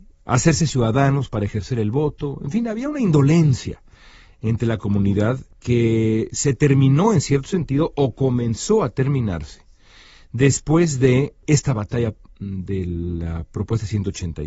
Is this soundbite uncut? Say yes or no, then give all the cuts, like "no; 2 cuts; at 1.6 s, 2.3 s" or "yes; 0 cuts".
yes; 0 cuts